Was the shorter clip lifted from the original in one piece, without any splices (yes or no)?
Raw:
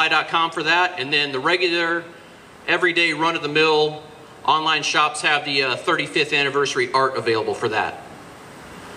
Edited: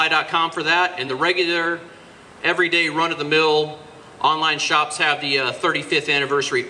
no